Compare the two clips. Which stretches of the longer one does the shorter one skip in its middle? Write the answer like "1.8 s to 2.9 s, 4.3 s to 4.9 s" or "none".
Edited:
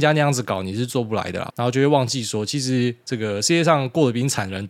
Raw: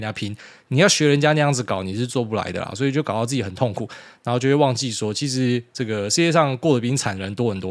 2.7 s to 4.2 s